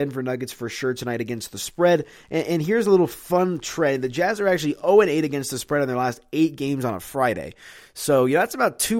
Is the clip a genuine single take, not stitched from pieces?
yes; 0 cuts

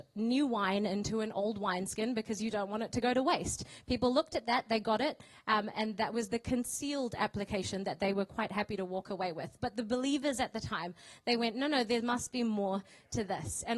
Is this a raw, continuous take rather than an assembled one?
yes; 0 cuts

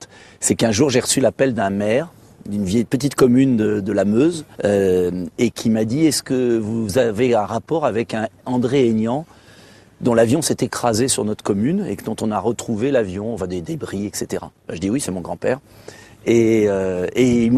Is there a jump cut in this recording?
yes; 1 cut; at 4.5 s

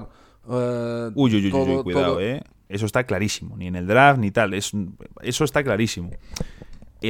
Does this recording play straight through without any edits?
no; 1 cut; at 2.7 s

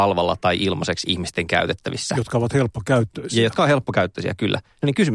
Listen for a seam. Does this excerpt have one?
no; 0 cuts

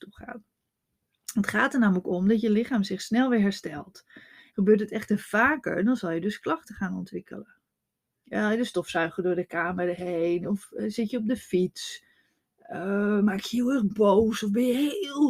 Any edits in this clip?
yes; 2 cuts; at 4.5 s, 8.2 s

